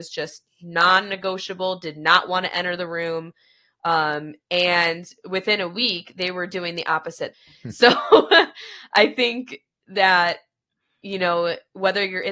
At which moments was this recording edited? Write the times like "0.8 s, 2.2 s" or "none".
7.3 s